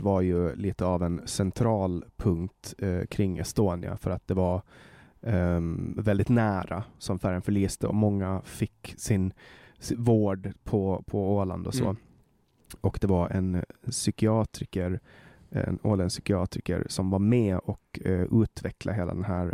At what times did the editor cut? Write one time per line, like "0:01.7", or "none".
none